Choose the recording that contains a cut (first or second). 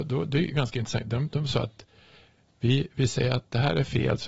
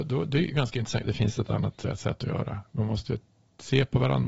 second